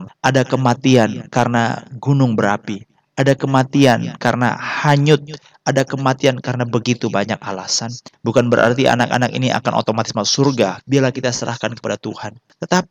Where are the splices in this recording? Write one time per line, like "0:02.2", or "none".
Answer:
0:08.1
0:10.8